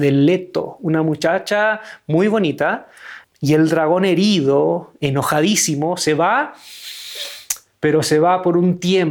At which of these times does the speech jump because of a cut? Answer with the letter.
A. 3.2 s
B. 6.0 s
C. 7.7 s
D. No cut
A